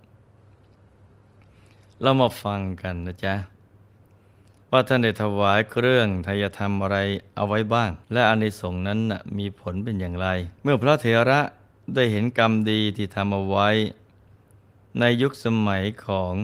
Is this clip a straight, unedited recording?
no; 2 cuts; at 8.0 s, 10.6 s

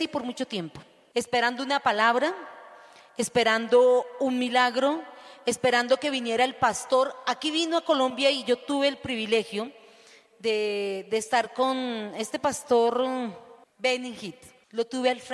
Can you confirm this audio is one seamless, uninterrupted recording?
yes; 0 cuts

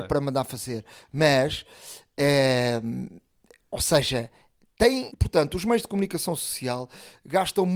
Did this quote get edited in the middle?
yes; 1 cut; at 5.1 s

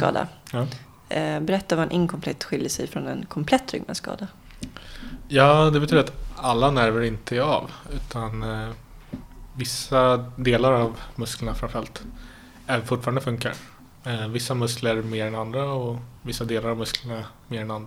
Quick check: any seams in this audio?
no; 0 cuts

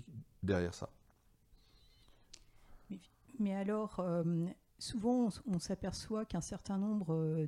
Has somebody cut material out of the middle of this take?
no; 0 cuts

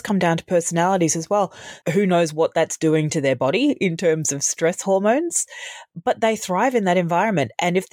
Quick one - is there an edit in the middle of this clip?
yes; 1 cut; at 1.8 s

